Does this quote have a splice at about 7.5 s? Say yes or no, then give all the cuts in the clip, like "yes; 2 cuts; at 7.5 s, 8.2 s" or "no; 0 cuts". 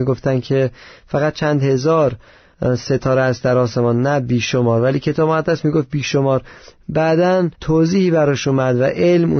yes; 1 cut; at 7.5 s